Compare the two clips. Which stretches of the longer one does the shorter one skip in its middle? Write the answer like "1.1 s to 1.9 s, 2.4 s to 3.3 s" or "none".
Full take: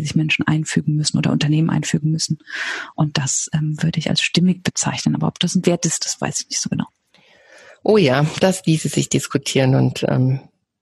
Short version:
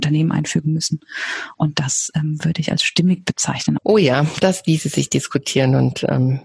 5.2 s to 7.8 s